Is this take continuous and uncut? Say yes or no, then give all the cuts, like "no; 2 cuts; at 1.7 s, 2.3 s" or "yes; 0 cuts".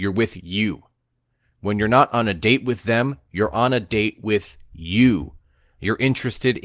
yes; 0 cuts